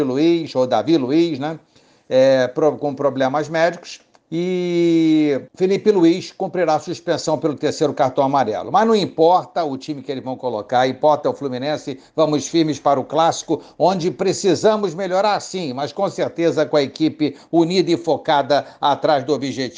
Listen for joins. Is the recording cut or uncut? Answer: cut